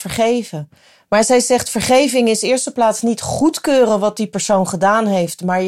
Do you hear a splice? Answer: no; 0 cuts

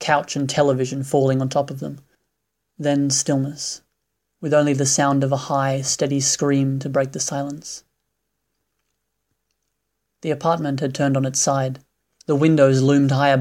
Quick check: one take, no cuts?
yes; 0 cuts

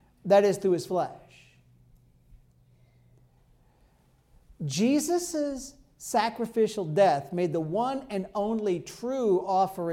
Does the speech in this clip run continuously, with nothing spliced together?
yes; 0 cuts

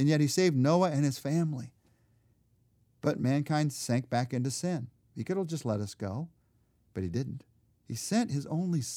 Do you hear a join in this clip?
yes; 1 cut; at 7.8 s

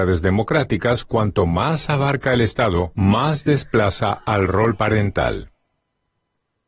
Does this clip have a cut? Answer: no; 0 cuts

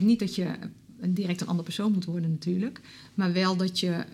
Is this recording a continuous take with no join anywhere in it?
yes; 0 cuts

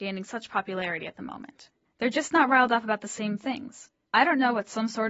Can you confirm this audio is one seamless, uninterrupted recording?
no; 2 cuts; at 1.9 s, 4.1 s

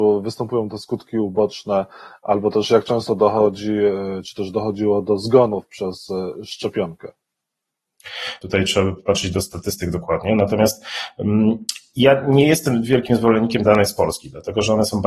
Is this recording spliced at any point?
yes; 1 cut; at 8.4 s

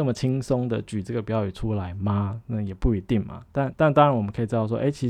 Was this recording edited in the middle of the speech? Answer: no; 0 cuts

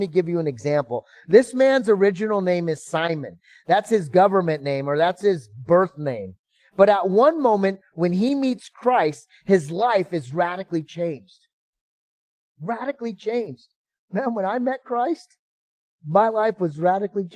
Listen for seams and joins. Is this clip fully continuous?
yes; 0 cuts

